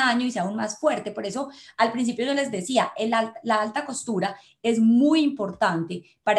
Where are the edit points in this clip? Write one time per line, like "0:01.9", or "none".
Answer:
none

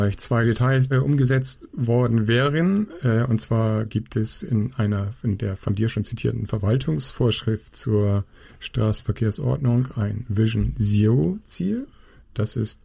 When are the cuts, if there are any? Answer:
0:00.9

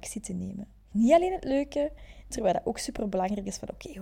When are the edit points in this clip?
0:00.9
0:02.3

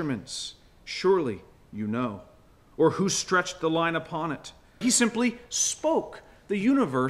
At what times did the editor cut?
0:04.8

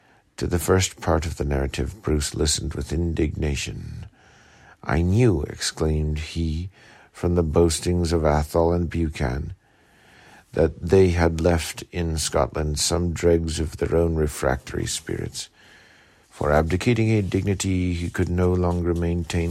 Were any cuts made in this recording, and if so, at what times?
0:16.2

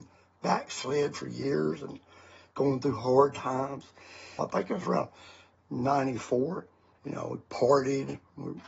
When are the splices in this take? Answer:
0:04.4
0:07.0

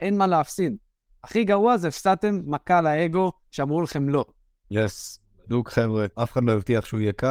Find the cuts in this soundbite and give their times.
0:04.6
0:06.1

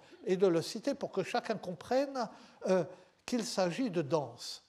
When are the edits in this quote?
none

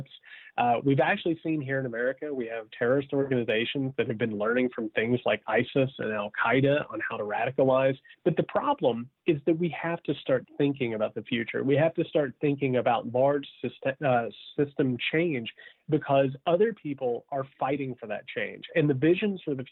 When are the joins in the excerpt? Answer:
0:08.1

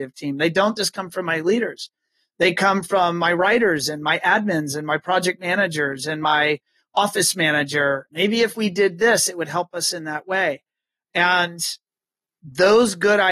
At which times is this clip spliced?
0:08.1

